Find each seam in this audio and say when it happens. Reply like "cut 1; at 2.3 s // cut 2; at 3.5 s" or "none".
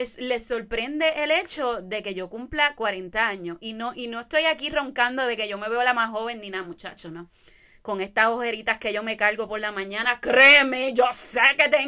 none

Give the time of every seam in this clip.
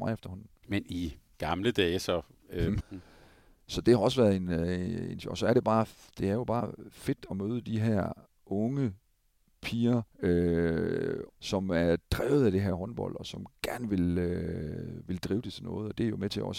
cut 1; at 2.8 s // cut 2; at 10.1 s // cut 3; at 11.3 s

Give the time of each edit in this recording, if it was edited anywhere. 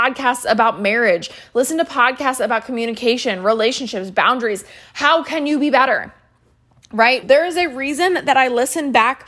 cut 1; at 7.2 s

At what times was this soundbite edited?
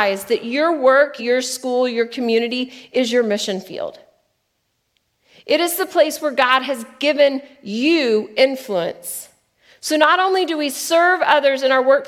cut 1; at 1.2 s

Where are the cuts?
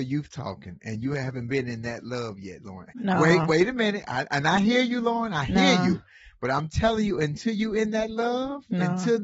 cut 1; at 2.9 s

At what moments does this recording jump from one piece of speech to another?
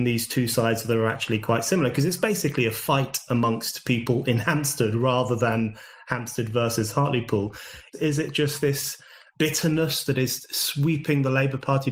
cut 1; at 7.9 s

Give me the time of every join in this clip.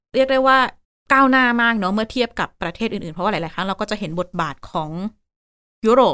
none

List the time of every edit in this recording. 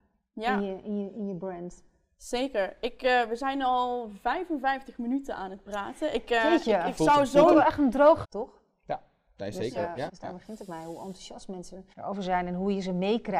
cut 1; at 8.2 s // cut 2; at 10.1 s // cut 3; at 11.9 s

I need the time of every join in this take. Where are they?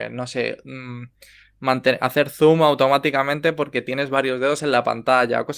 none

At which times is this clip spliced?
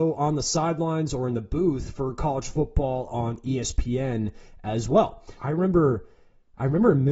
cut 1; at 5.4 s

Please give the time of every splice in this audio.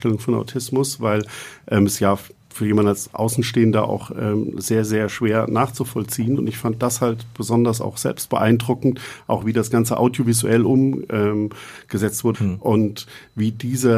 cut 1; at 12.3 s

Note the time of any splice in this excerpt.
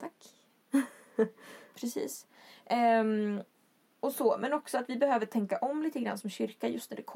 cut 1; at 1.7 s

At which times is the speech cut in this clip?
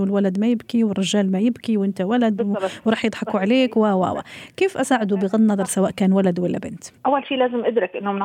cut 1; at 7.0 s

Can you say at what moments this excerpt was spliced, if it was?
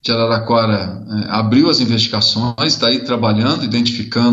none

